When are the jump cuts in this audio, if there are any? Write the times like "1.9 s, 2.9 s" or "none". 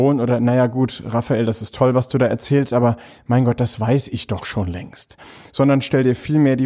none